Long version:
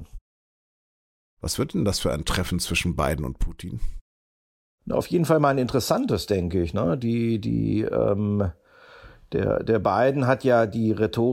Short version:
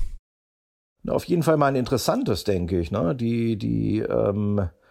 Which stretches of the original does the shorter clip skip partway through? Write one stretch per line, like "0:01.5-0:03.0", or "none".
none